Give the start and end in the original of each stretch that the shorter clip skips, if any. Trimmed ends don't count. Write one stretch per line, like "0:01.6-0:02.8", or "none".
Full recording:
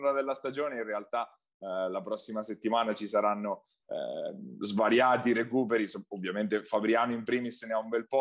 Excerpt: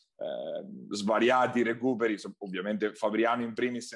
none